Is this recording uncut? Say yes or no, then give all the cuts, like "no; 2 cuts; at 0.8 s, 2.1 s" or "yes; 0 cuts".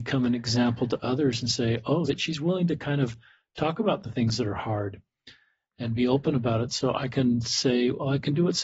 no; 1 cut; at 2.1 s